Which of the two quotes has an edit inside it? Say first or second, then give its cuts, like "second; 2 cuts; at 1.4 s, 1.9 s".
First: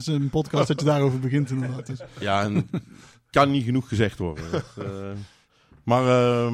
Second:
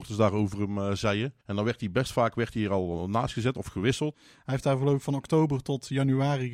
second; 2 cuts; at 1.4 s, 4.1 s